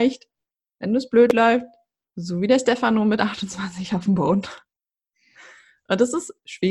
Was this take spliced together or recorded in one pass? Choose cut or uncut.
uncut